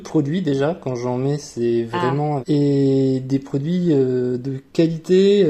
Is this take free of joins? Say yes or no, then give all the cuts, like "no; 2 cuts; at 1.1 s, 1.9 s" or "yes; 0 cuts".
no; 1 cut; at 2.4 s